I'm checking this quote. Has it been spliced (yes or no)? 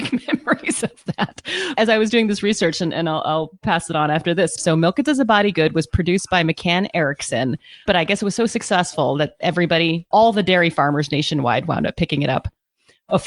yes